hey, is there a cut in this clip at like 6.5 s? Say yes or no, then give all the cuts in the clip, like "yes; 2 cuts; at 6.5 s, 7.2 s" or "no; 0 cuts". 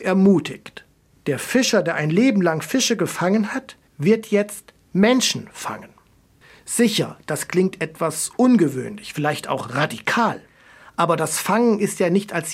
no; 0 cuts